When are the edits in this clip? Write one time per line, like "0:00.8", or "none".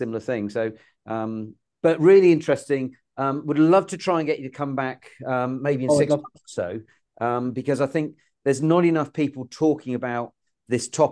none